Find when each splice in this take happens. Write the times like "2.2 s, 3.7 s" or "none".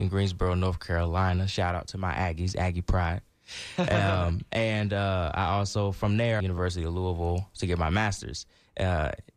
6.4 s